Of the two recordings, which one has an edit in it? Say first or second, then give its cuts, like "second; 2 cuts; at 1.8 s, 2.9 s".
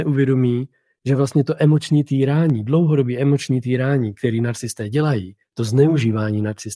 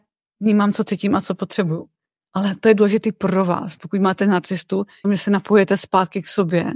second; 2 cuts; at 3.8 s, 5.0 s